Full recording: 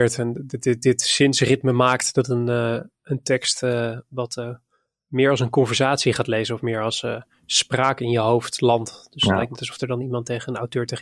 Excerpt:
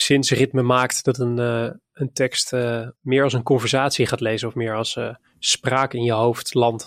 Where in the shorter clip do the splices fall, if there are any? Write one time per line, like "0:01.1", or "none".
0:03.0